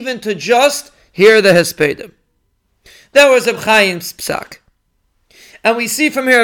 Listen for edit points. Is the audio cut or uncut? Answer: uncut